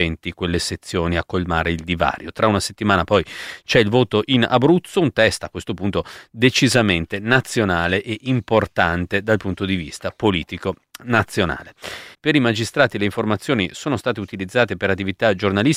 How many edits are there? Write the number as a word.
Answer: one